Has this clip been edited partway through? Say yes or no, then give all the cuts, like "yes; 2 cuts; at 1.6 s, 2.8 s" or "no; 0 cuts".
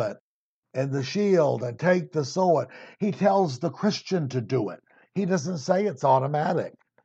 no; 0 cuts